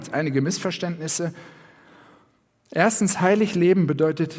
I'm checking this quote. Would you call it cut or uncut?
uncut